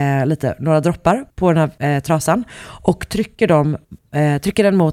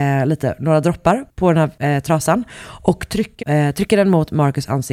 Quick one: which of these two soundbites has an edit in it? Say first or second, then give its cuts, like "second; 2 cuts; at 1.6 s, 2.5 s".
second; 1 cut; at 3.4 s